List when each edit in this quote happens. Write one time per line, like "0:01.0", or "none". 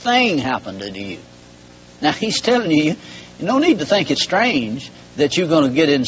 none